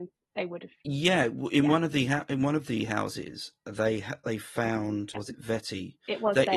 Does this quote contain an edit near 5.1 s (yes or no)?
yes